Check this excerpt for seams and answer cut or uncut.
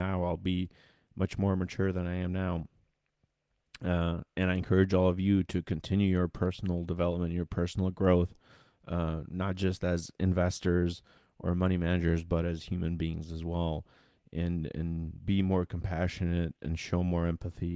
uncut